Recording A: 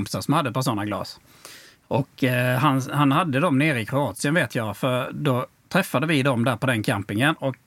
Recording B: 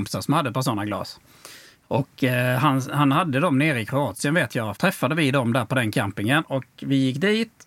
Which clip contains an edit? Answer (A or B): B